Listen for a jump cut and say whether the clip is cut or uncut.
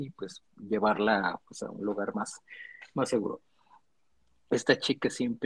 uncut